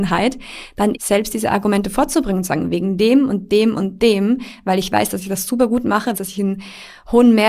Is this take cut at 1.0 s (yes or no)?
yes